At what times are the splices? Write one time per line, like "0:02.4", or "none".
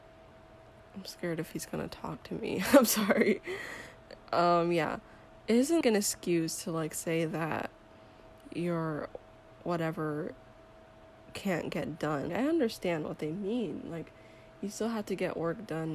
0:05.8
0:12.3